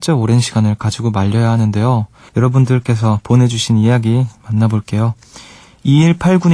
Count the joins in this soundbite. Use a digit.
1